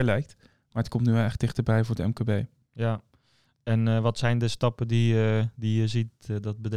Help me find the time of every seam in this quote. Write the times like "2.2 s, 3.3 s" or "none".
none